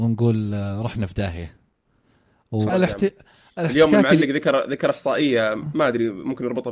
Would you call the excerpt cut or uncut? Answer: cut